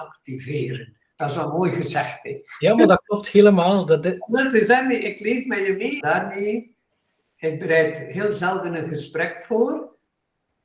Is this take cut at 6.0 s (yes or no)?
yes